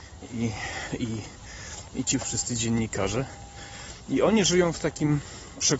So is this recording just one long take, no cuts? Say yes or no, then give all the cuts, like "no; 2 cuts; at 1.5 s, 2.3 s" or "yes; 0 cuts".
no; 1 cut; at 2.2 s